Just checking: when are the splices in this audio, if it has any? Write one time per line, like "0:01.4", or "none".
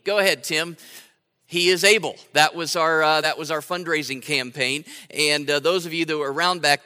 none